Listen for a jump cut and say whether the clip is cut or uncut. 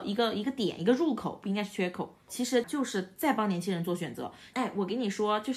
cut